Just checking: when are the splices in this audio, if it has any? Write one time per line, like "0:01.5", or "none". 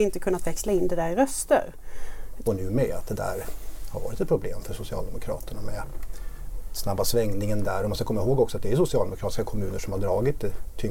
0:02.4